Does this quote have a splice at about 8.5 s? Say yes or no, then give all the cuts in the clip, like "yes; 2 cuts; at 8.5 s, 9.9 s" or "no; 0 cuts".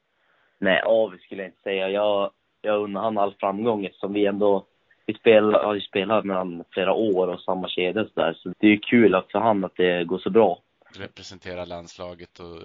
yes; 2 cuts; at 8.5 s, 10.9 s